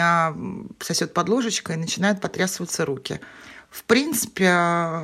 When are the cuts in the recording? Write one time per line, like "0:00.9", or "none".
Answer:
none

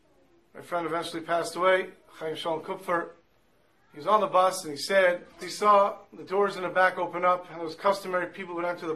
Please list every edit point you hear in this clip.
0:05.4

